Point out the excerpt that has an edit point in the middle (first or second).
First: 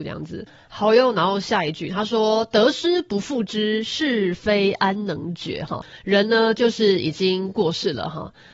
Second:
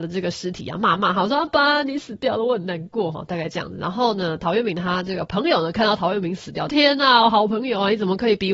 second